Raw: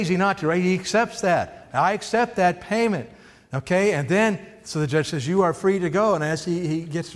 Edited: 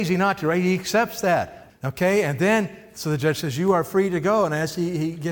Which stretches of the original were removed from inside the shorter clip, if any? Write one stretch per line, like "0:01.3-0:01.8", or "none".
0:01.7-0:03.4